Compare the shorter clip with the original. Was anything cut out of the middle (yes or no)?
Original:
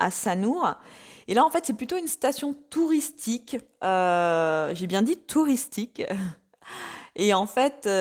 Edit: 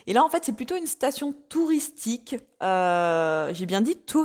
no